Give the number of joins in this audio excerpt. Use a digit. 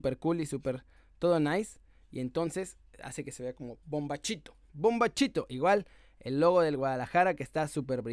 0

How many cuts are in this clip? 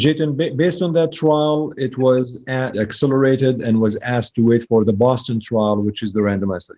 1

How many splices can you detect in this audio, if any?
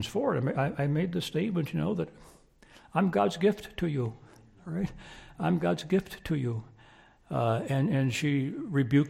0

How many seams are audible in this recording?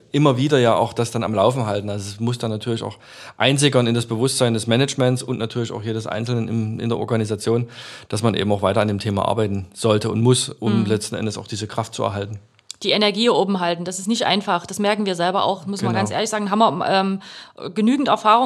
0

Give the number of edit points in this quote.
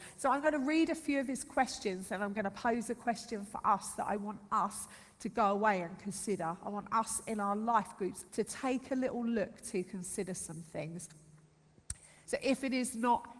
2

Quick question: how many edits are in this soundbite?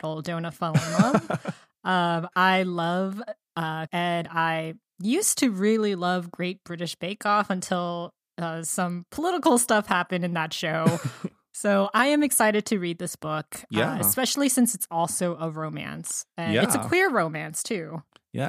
1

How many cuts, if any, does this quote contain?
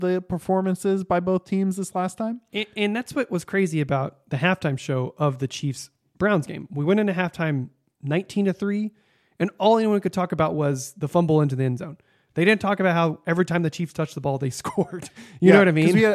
0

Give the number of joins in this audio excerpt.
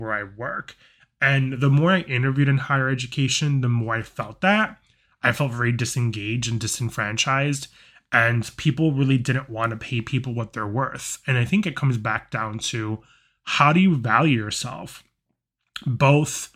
0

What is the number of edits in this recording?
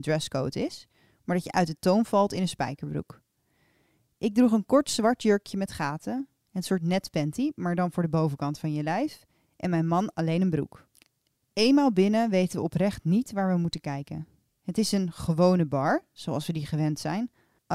0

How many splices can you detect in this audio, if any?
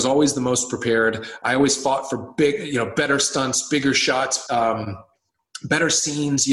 1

